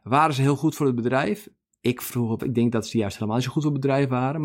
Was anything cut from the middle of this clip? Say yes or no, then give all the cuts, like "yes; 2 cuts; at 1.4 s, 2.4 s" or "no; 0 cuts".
yes; 1 cut; at 2.4 s